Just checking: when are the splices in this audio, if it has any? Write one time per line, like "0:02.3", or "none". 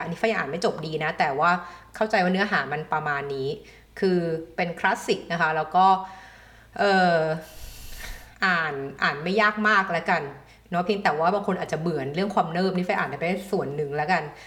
0:08.3